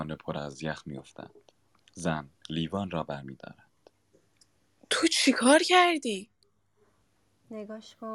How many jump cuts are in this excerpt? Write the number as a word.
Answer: one